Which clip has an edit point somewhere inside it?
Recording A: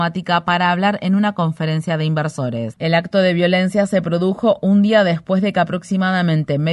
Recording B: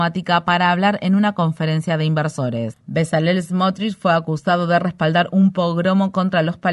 A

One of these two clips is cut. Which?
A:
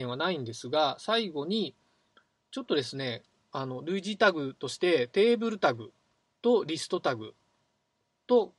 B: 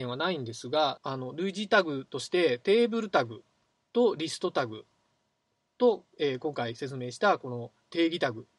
B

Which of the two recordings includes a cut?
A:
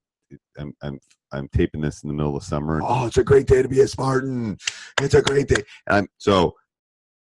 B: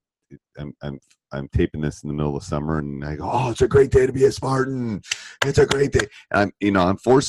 A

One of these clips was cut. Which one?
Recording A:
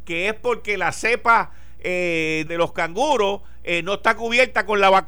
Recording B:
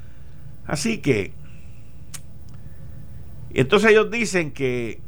A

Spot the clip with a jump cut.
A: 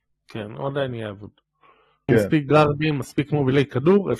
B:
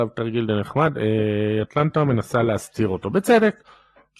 A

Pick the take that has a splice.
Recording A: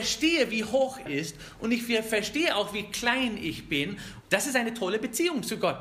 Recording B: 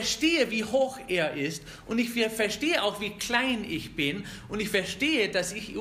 A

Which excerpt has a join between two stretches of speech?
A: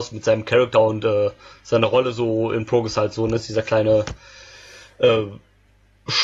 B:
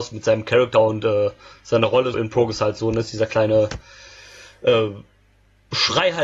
B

